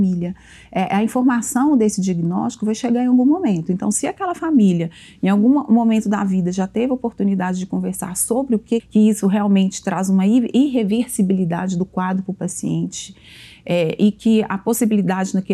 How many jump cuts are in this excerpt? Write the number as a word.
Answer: one